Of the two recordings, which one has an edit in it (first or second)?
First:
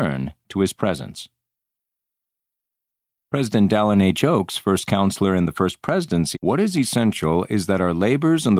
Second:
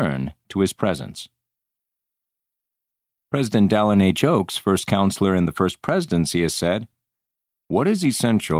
first